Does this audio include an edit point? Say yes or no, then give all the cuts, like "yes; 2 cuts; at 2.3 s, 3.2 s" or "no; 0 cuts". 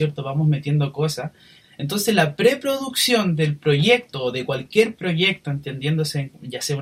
yes; 1 cut; at 1.6 s